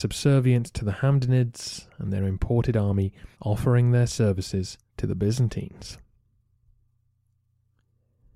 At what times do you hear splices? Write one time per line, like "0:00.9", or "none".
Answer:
0:03.3
0:04.9